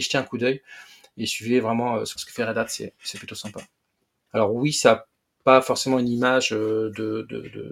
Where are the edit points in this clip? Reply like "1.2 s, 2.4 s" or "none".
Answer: 2.2 s, 4.3 s